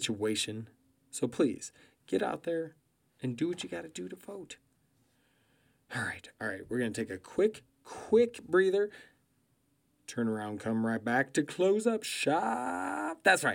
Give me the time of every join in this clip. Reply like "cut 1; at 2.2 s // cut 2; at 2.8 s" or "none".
cut 1; at 6.3 s